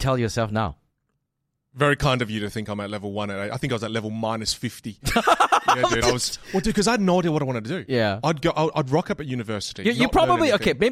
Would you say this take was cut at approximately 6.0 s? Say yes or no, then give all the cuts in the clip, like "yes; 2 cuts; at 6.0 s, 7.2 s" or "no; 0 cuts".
no; 0 cuts